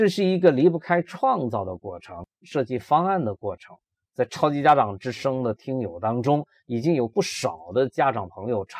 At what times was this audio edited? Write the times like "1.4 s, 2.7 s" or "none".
2.4 s